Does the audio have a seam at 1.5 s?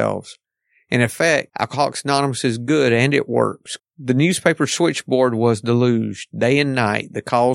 yes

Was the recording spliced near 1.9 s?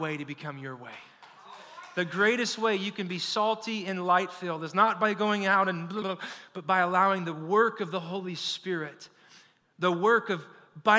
no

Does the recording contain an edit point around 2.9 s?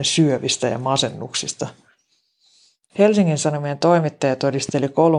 yes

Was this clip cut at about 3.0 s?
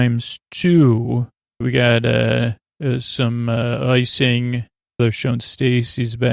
no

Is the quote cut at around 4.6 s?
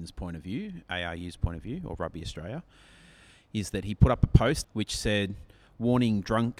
yes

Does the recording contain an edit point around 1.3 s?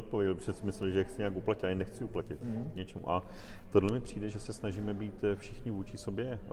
no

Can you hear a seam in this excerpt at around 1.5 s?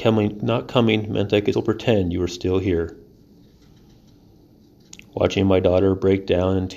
yes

